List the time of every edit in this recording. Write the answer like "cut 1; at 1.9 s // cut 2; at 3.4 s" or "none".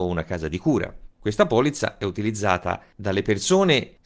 cut 1; at 1.1 s

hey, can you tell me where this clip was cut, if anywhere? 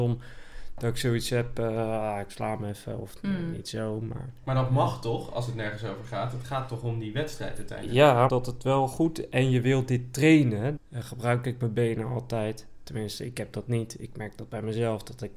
cut 1; at 8.3 s // cut 2; at 10.8 s

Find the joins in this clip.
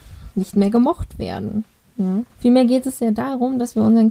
cut 1; at 2.3 s

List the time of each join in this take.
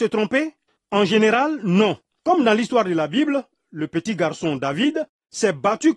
cut 1; at 2.1 s

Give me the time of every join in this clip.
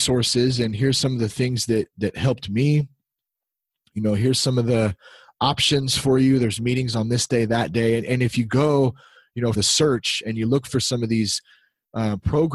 cut 1; at 9.5 s

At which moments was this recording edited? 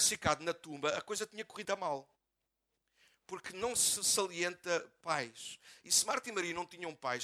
cut 1; at 1.6 s

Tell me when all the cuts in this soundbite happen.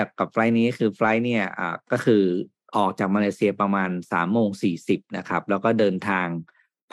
none

